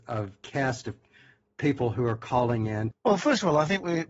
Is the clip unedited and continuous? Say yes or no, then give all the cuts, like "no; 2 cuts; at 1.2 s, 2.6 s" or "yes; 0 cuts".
no; 1 cut; at 2.9 s